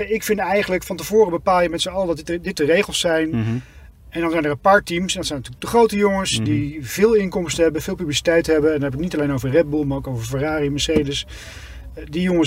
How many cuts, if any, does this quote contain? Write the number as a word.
zero